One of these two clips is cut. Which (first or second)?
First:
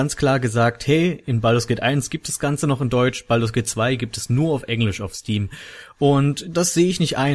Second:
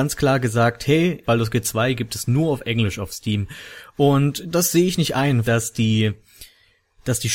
second